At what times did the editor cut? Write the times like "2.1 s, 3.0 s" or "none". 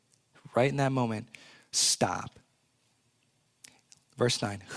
none